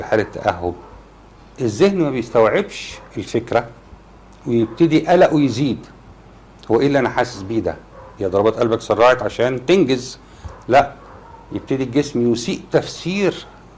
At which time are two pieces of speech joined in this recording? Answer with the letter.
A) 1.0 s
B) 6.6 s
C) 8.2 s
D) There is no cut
C